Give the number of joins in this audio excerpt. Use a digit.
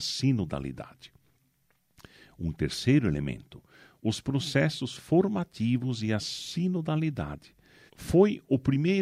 1